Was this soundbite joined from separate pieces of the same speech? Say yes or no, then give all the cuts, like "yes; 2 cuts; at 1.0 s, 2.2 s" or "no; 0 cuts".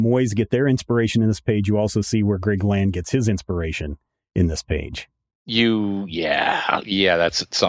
no; 0 cuts